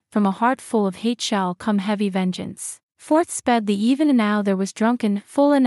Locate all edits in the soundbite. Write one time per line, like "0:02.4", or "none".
0:02.9